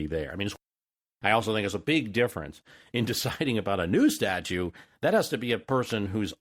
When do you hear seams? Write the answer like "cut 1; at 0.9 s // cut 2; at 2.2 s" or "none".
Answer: none